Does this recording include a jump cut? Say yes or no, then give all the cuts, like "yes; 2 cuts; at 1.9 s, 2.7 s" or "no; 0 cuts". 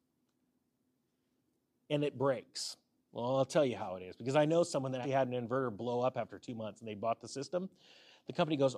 yes; 2 cuts; at 2.9 s, 5.0 s